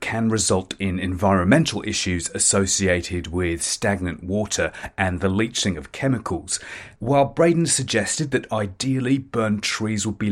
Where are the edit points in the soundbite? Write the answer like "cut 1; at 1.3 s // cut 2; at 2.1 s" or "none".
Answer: cut 1; at 7.0 s